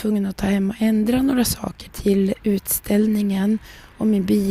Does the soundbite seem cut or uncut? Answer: cut